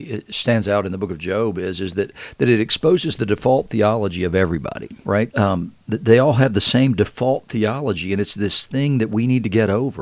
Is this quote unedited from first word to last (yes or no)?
no